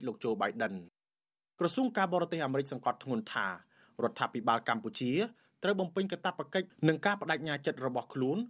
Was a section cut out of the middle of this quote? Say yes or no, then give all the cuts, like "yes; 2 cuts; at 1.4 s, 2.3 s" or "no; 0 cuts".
no; 0 cuts